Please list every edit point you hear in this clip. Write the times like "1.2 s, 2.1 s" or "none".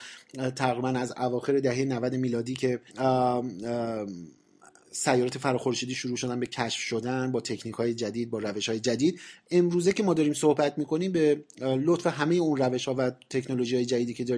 2.9 s